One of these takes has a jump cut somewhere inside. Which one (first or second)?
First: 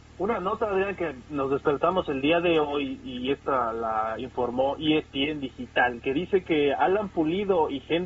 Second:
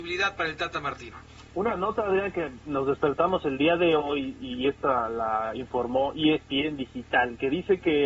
second